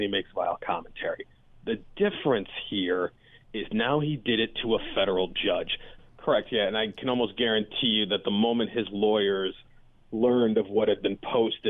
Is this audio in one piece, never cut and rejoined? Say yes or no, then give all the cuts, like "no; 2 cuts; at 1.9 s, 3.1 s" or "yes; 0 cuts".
no; 1 cut; at 6.0 s